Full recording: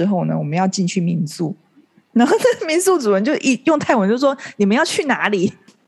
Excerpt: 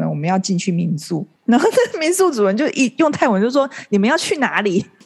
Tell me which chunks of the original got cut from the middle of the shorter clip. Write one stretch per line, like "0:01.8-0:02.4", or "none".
0:01.6-0:02.0